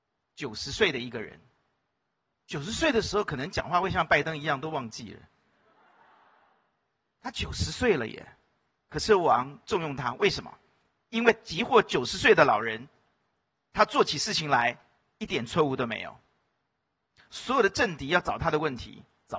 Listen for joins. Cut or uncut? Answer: uncut